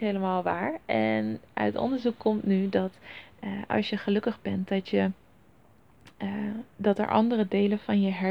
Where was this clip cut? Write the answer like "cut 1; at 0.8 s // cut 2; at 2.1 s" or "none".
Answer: none